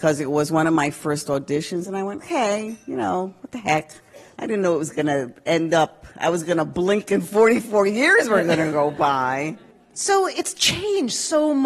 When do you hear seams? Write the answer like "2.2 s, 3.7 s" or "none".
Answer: 2.2 s